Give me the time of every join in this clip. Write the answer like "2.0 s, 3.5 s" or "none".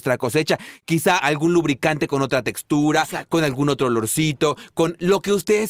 1.2 s